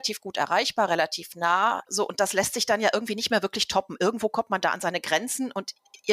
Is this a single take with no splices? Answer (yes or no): no